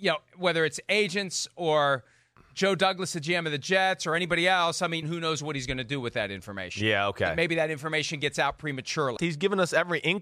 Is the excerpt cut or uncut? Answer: cut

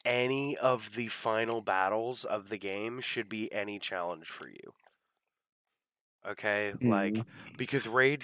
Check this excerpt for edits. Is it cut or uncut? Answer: uncut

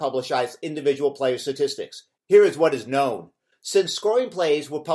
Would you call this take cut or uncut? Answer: cut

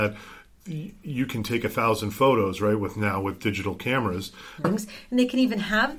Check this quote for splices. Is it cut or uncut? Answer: cut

